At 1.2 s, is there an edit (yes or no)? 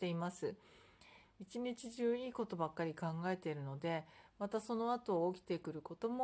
yes